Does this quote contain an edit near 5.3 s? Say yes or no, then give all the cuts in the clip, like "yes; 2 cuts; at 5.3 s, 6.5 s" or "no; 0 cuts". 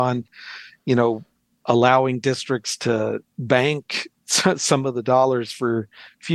no; 2 cuts; at 1.6 s, 3.3 s